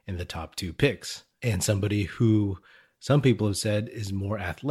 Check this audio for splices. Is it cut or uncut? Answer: uncut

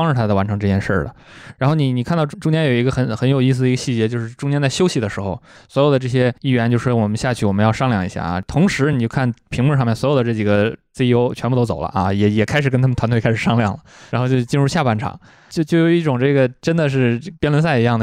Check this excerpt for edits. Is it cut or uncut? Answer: uncut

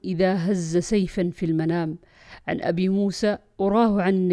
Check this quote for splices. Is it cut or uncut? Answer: uncut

